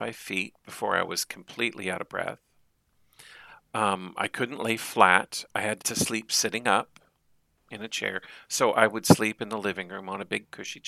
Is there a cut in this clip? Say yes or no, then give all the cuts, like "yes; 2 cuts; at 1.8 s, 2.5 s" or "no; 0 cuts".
yes; 1 cut; at 5.8 s